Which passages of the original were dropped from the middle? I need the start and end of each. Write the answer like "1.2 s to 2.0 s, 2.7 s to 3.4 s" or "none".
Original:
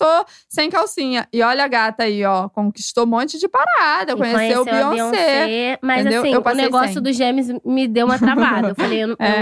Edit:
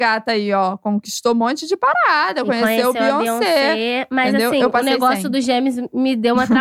none